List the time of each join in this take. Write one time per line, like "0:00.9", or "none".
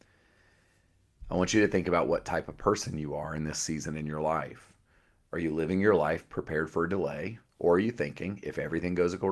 none